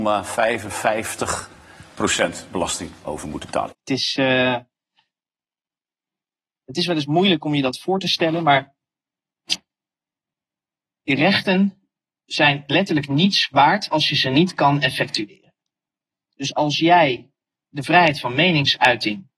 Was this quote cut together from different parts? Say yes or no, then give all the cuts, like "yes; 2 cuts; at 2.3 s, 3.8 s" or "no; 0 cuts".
yes; 1 cut; at 3.7 s